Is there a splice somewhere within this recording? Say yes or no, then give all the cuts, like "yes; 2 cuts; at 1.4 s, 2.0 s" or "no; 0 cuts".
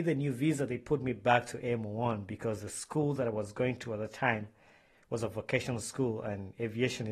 no; 0 cuts